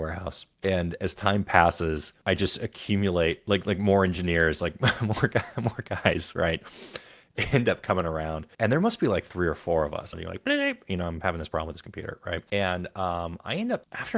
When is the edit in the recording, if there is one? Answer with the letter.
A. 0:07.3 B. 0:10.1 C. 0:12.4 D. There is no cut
B